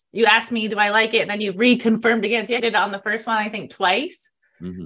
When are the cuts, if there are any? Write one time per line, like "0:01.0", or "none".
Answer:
0:02.6